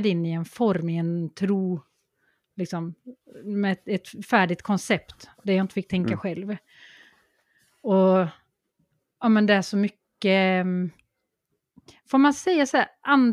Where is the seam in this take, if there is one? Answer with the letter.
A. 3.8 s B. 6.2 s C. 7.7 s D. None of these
D